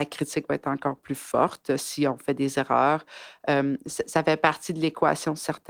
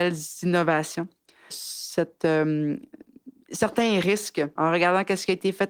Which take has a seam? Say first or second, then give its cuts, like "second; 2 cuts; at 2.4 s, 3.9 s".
second; 2 cuts; at 1.5 s, 4.6 s